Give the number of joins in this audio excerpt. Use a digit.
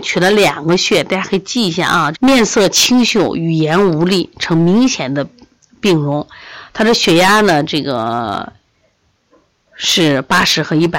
1